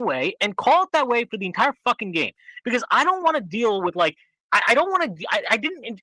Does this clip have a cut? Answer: no; 0 cuts

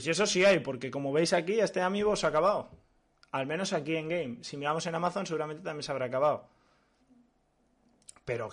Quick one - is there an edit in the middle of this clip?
no; 0 cuts

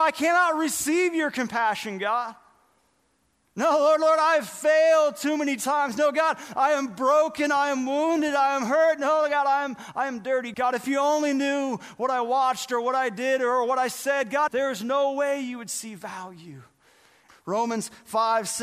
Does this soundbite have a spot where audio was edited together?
yes; 3 cuts; at 10.5 s, 14.5 s, 17.3 s

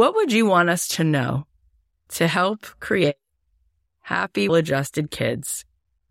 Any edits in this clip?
yes; 1 cut; at 4.5 s

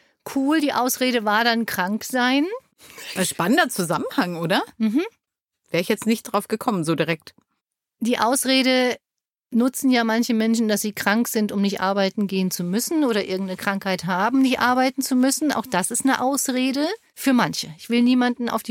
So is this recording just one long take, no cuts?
no; 1 cut; at 14.3 s

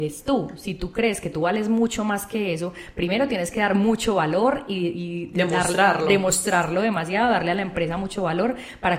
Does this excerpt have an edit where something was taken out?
no; 0 cuts

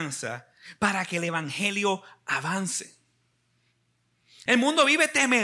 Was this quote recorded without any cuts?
no; 1 cut; at 4.5 s

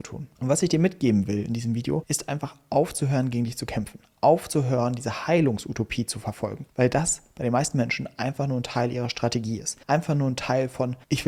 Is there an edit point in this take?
no; 0 cuts

